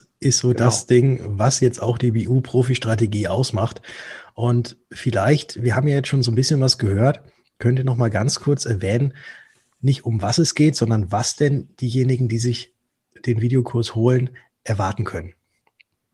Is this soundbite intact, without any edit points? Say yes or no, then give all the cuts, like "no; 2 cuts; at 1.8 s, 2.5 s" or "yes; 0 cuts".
yes; 0 cuts